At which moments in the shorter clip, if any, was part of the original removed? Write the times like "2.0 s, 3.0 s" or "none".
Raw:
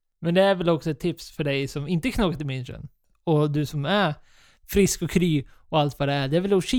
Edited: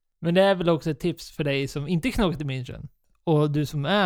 none

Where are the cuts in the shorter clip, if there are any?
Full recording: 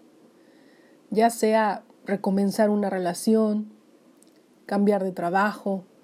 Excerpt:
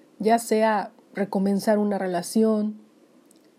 none

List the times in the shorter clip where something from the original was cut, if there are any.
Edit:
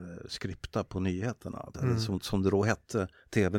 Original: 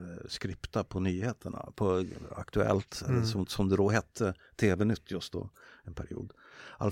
1.7 s

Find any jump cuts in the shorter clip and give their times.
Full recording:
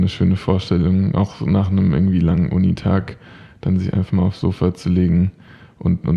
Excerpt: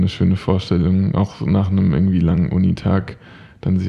none

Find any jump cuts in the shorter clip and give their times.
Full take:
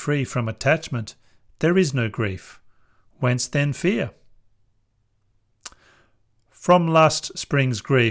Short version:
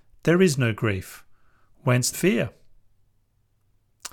2.1 s

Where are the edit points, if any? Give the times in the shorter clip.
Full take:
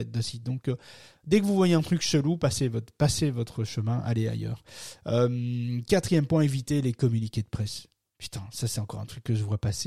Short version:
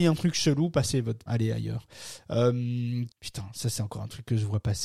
1.3 s, 3.1 s

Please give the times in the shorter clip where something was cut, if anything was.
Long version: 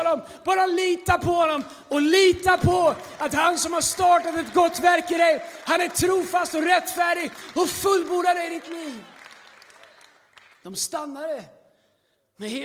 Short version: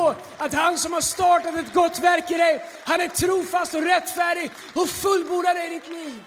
none

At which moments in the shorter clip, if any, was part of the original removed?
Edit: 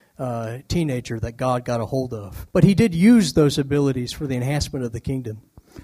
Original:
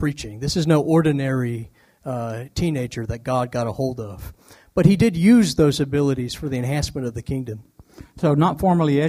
2.5 s

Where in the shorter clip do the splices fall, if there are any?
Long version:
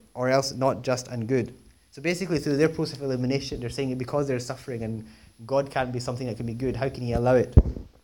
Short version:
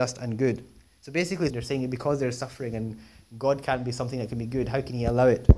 1.5 s

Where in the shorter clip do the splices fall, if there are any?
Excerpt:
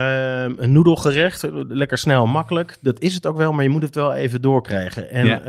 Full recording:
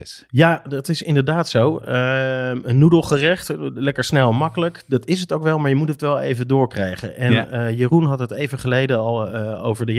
none

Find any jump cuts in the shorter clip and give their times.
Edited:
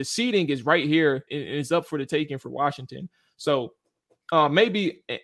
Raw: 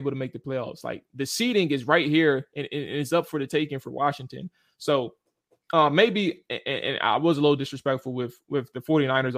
1.3 s

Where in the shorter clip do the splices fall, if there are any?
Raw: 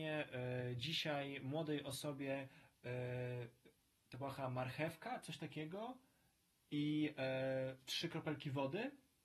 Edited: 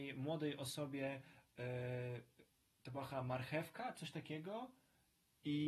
none

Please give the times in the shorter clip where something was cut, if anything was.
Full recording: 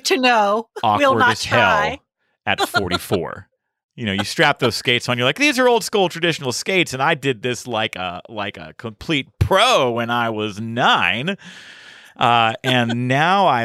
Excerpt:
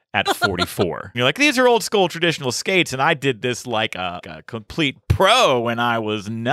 1.1 s, 4.2 s

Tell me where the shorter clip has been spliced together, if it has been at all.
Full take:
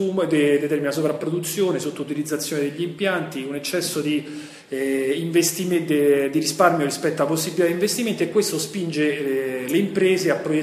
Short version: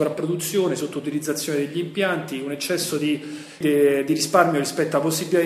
3.6 s

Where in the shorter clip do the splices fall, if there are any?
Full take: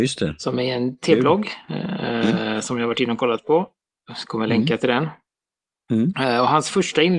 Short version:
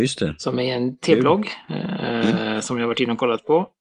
none

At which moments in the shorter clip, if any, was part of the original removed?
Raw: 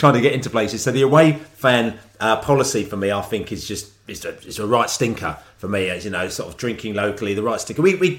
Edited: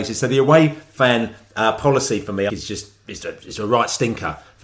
2.5 s

